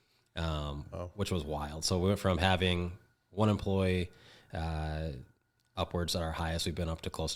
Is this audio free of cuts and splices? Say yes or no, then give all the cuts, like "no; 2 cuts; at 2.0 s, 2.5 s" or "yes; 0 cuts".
yes; 0 cuts